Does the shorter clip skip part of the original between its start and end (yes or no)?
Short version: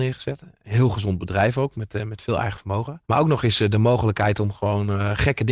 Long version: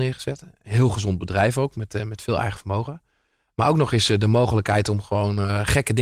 yes